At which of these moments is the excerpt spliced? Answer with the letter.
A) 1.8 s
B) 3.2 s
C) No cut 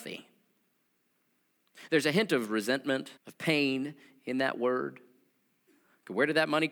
B